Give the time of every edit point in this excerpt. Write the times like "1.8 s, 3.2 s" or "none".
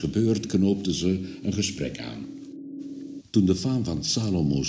3.2 s